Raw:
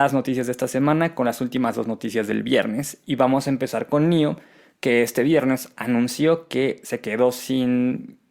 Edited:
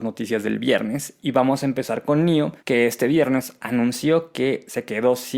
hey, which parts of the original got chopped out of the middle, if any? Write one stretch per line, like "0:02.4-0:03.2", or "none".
0:04.4-0:04.8